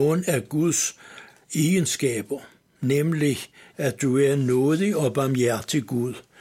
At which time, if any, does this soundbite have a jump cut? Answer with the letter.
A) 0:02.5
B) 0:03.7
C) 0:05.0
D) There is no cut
B